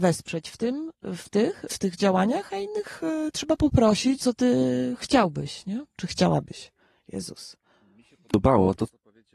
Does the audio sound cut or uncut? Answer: cut